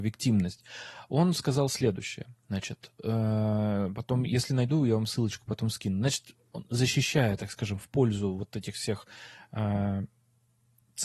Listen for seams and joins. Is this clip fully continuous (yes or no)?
yes